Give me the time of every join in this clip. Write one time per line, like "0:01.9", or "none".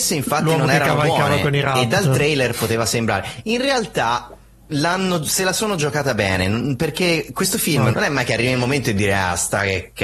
0:07.9

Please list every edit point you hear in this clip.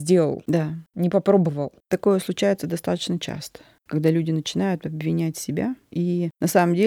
none

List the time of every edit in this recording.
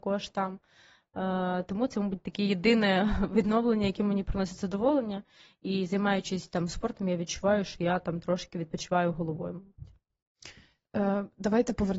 none

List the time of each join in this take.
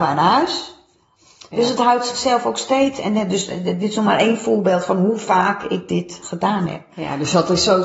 none

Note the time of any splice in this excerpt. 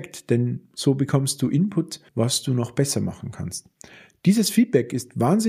0:02.1

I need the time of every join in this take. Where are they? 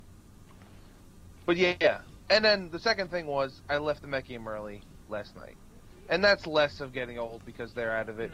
none

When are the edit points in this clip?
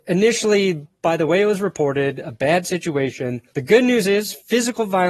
0:03.5

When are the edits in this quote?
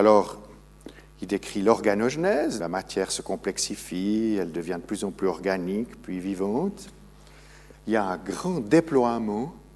0:02.6
0:07.7

